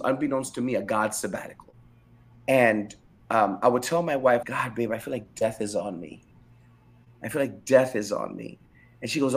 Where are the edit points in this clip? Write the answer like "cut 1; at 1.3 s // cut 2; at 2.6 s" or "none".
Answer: cut 1; at 2.3 s // cut 2; at 4.4 s